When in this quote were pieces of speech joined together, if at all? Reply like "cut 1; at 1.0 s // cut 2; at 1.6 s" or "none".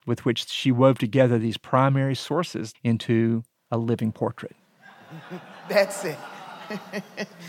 cut 1; at 2.7 s